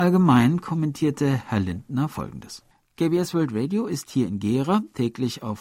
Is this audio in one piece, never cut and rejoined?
yes; 0 cuts

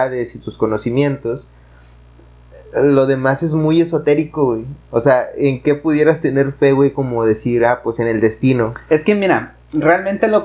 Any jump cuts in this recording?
no; 0 cuts

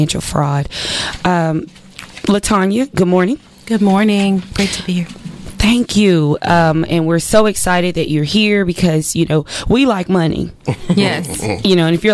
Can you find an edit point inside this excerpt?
no; 0 cuts

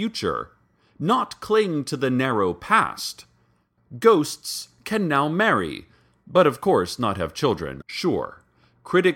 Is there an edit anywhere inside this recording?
yes; 2 cuts; at 3.8 s, 7.8 s

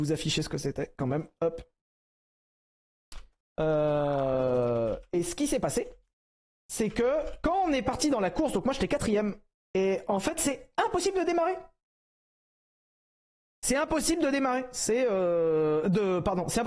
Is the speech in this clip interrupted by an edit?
no; 0 cuts

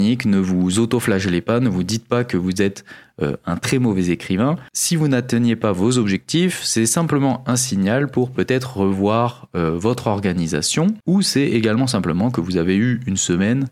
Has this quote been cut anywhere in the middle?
no; 0 cuts

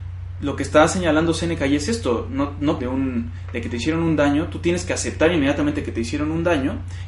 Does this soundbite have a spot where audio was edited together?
yes; 1 cut; at 2.8 s

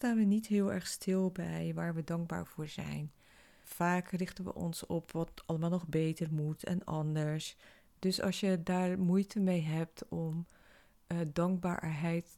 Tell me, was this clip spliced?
no; 0 cuts

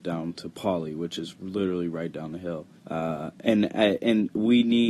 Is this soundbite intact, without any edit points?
no; 1 cut; at 2.8 s

